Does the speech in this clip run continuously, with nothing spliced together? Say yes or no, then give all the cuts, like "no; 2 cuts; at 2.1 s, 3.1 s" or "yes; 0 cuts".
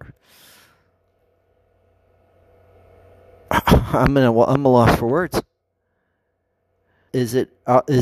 no; 1 cut; at 7.1 s